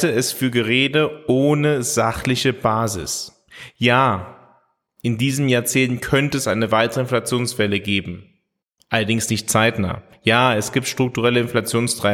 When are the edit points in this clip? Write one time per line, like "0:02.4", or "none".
none